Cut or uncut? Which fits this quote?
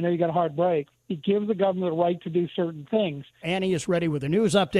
cut